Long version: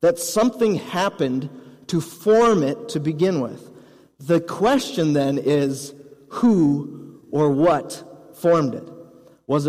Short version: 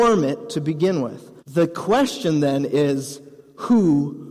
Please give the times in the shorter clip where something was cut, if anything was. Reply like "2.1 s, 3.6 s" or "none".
1.4 s